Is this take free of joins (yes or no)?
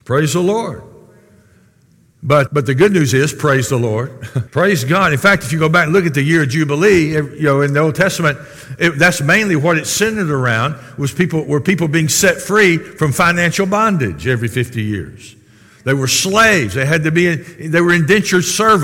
no